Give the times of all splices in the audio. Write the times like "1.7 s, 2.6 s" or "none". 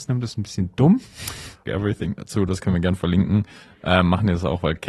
1.7 s